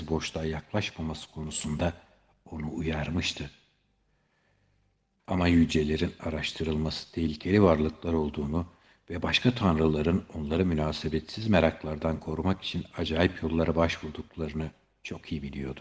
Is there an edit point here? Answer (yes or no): yes